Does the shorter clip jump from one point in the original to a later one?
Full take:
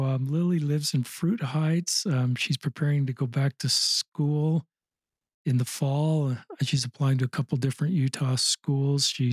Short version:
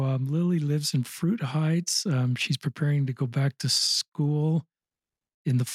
no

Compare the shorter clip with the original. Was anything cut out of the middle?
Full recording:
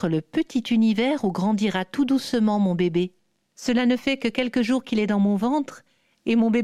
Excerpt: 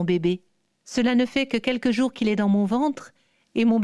no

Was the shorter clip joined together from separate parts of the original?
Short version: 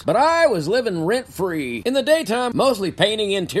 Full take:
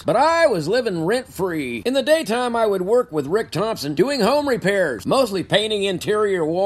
yes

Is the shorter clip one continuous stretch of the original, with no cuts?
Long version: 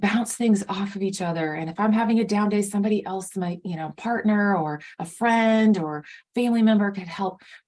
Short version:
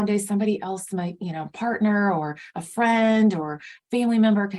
yes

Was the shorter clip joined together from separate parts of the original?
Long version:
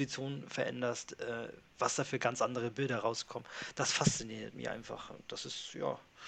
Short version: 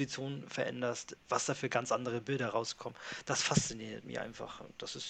yes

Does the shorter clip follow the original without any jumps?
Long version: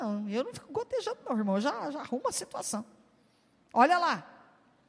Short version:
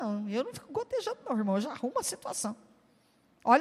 no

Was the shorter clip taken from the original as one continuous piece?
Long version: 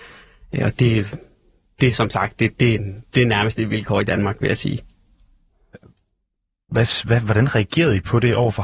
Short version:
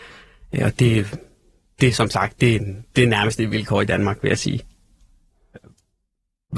no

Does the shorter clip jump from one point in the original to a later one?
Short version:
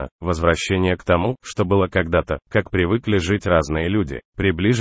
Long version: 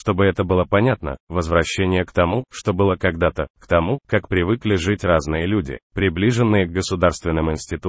yes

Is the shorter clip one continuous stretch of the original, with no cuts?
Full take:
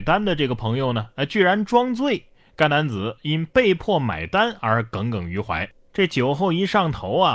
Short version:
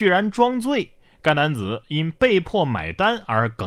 yes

